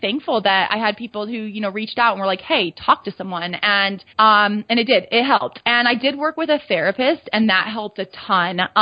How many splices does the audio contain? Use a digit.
2